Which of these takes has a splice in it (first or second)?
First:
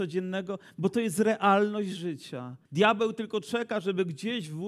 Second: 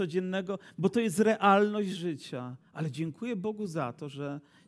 first